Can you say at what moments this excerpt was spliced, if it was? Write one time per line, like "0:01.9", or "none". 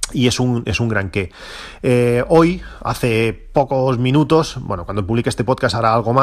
none